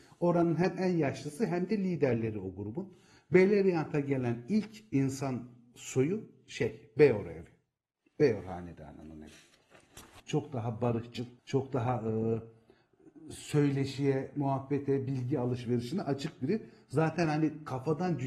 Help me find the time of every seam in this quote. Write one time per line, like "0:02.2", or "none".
0:10.2
0:11.4

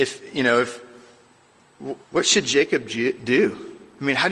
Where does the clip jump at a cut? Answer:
0:02.0

